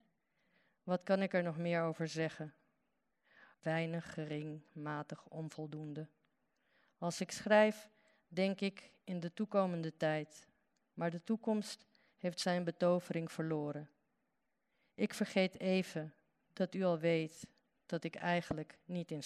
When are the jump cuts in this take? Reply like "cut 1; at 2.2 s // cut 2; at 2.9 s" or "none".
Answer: cut 1; at 3.5 s